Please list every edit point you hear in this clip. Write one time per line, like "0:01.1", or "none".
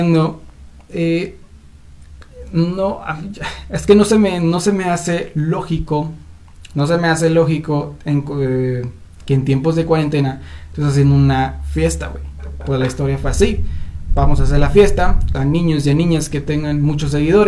0:14.1
0:15.3

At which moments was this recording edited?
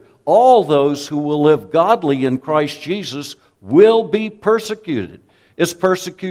none

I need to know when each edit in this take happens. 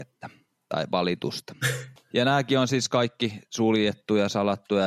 0:02.0

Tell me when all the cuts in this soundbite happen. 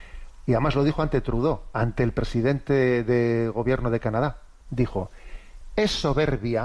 0:04.7

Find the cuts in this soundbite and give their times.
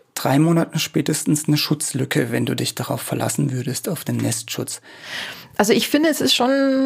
none

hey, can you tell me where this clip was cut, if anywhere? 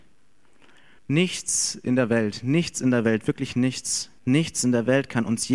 0:01.0
0:04.2

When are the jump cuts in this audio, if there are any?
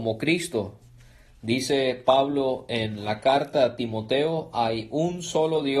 none

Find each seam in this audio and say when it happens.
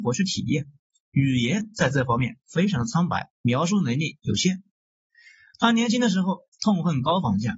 0:03.3

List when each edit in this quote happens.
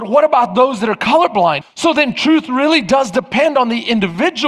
0:01.6

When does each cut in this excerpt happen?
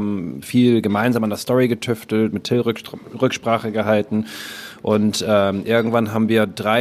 none

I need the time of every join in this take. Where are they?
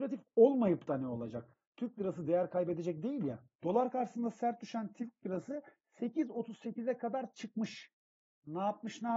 0:03.5

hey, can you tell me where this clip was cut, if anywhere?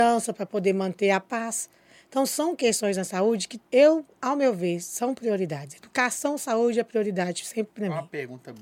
0:03.7

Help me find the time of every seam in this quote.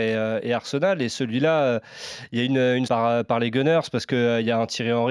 0:02.9

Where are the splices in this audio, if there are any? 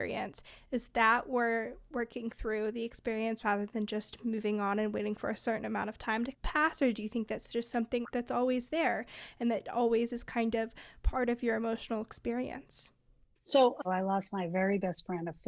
0:13.8

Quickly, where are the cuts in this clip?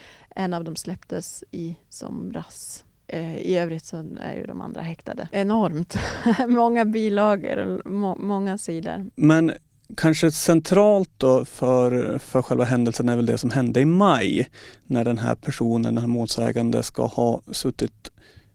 0:05.3

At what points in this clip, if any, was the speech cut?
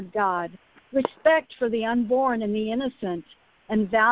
none

